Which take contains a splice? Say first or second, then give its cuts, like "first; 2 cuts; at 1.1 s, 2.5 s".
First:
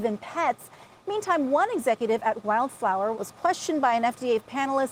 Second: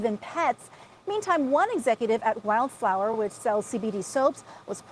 first; 1 cut; at 3.1 s